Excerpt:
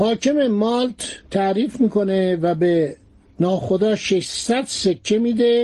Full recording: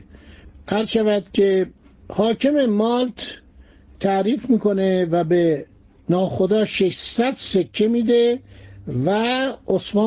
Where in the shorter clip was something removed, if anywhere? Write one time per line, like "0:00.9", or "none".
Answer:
0:01.2